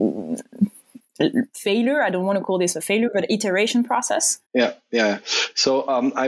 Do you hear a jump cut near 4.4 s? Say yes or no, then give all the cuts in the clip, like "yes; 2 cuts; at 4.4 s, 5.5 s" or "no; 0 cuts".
yes; 1 cut; at 4.4 s